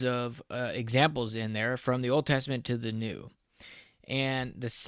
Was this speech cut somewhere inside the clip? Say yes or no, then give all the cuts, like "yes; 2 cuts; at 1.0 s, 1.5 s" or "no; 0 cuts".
no; 0 cuts